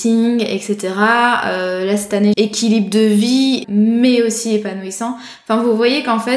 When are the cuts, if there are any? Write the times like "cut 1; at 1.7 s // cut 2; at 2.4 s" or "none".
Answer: cut 1; at 2.3 s // cut 2; at 3.6 s